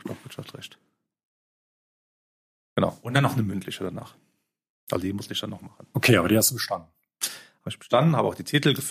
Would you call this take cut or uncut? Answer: uncut